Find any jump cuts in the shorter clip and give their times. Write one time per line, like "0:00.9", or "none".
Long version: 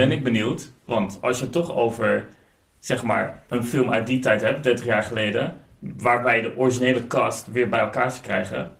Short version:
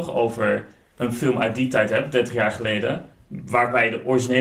0:00.9